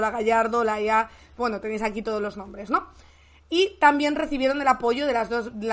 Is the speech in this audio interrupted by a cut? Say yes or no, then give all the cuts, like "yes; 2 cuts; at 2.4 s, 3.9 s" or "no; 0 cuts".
no; 0 cuts